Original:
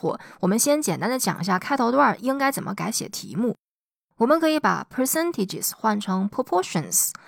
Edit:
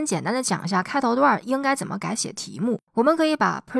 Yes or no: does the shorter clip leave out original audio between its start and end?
yes